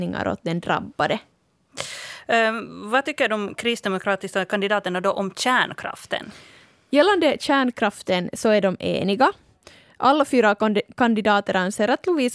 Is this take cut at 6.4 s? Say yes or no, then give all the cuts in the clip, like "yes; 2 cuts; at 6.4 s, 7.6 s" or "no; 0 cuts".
no; 0 cuts